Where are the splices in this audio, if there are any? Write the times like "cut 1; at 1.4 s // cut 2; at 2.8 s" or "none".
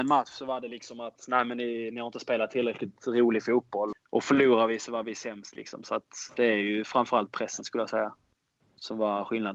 cut 1; at 3.9 s